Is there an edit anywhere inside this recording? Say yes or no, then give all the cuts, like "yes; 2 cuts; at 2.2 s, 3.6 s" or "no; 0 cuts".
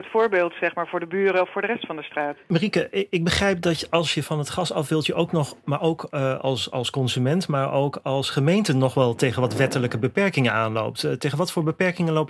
no; 0 cuts